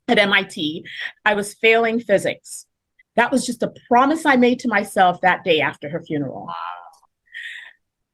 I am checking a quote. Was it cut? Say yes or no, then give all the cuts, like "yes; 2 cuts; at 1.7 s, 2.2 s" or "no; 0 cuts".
yes; 2 cuts; at 1.2 s, 3.0 s